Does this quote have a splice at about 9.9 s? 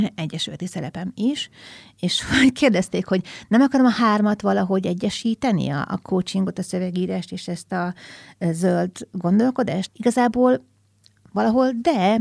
yes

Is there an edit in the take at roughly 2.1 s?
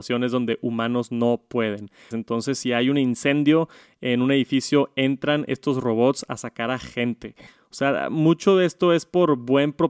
yes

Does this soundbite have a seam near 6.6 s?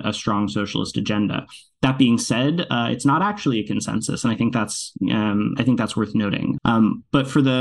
yes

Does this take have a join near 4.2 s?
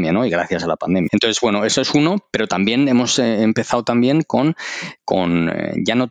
no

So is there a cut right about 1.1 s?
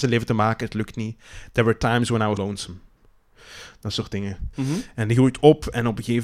no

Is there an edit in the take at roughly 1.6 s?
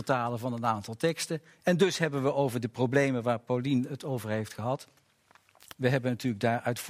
yes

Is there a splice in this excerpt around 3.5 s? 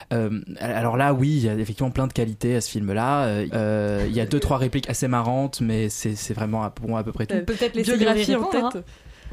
yes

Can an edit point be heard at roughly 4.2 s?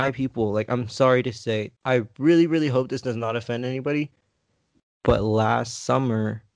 no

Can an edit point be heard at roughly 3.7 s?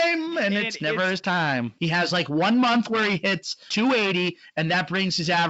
yes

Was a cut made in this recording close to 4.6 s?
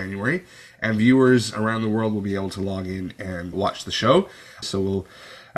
yes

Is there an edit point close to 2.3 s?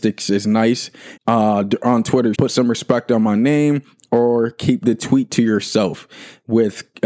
yes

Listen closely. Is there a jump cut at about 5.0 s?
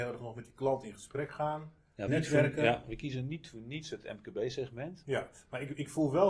yes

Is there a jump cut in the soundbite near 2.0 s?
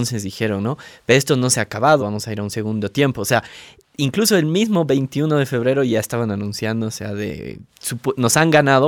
yes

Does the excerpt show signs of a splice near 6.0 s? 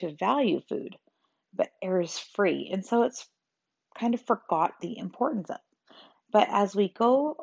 no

